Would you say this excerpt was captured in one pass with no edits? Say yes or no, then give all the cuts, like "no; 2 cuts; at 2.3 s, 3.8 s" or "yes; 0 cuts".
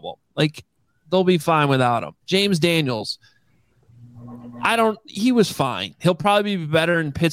no; 2 cuts; at 2.2 s, 6.0 s